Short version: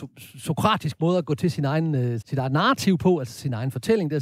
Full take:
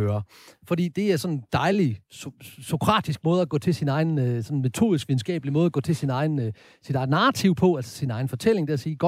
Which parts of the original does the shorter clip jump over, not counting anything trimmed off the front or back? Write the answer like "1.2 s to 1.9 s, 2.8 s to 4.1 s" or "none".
4.4 s to 6.8 s